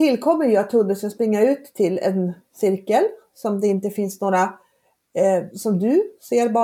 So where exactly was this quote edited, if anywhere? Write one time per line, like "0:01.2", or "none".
0:05.5